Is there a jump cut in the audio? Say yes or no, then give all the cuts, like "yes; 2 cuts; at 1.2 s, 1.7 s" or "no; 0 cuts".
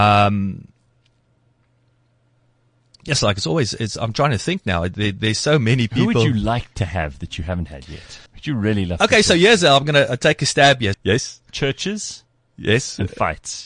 yes; 2 cuts; at 8.3 s, 10.9 s